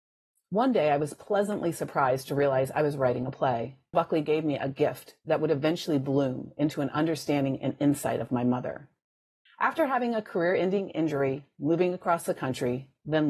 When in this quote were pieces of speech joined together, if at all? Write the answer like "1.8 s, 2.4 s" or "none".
3.9 s, 9.5 s